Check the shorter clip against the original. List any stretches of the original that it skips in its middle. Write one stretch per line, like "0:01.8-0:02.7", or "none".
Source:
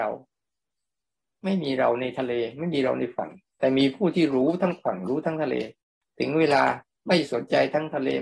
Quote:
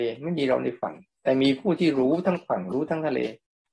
none